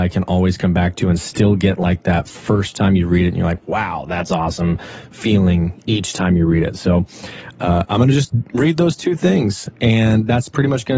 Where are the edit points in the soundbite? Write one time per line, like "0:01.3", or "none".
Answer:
none